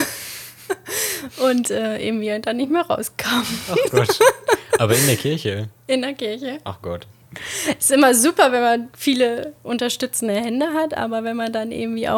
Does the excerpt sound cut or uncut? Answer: cut